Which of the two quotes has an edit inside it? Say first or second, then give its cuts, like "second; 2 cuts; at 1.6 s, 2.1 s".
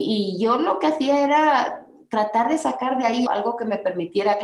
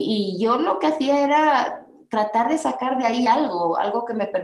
first; 1 cut; at 3.3 s